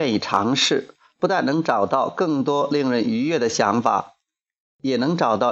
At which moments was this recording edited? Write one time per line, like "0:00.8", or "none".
none